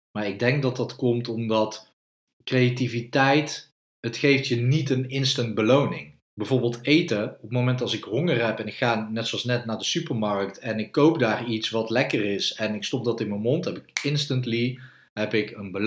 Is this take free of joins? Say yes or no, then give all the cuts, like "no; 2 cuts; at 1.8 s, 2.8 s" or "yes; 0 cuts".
no; 2 cuts; at 3.9 s, 6.2 s